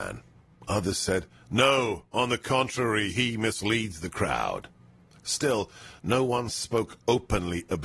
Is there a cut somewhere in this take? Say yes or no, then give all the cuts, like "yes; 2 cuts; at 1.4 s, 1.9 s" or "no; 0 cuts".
no; 0 cuts